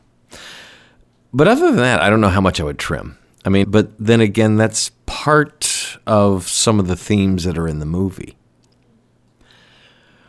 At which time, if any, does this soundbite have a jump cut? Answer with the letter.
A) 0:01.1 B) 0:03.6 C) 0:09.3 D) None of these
B